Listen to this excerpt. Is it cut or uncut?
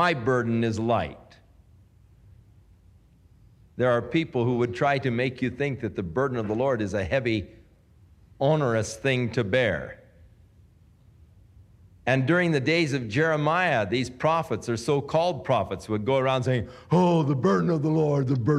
uncut